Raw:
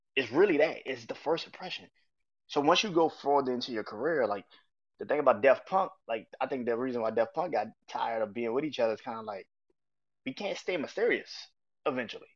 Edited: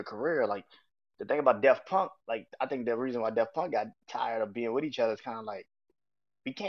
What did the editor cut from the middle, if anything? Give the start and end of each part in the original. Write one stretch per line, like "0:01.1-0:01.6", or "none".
none